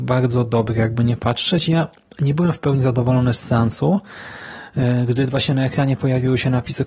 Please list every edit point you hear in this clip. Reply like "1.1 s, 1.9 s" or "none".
none

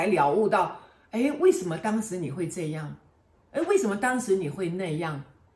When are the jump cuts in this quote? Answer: none

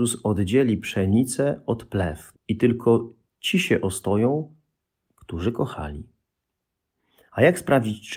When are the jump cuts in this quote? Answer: 2.3 s

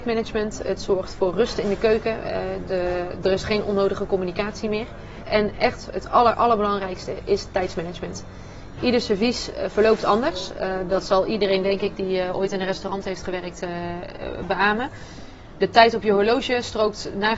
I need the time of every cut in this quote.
5.2 s

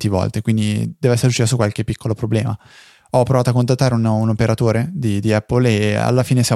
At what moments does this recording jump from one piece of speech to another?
none

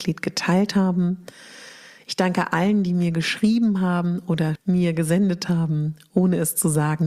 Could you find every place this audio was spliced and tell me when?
4.6 s

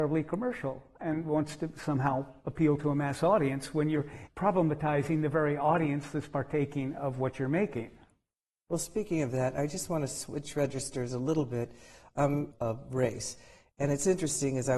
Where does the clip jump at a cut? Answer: 4.3 s, 12.5 s

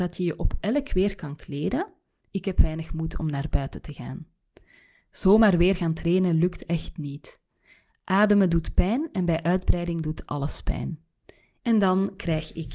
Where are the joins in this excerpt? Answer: 5.0 s, 11.6 s

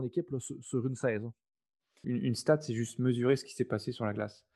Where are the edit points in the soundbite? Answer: 2.0 s

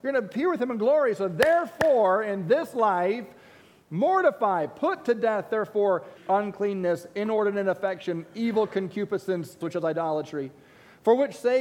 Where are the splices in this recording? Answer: 6.2 s, 9.6 s

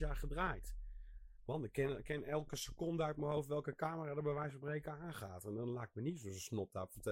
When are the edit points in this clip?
none

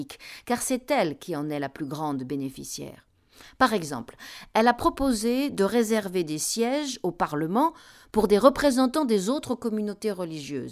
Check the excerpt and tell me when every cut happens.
none

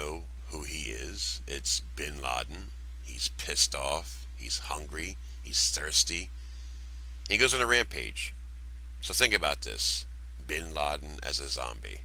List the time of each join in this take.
none

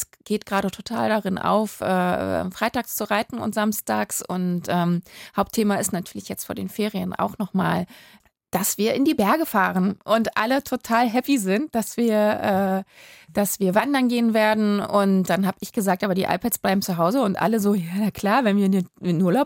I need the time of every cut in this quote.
none

